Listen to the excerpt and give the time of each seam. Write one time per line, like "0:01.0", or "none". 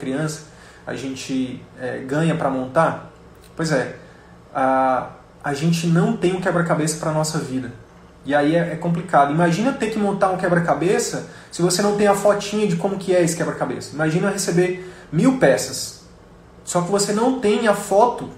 none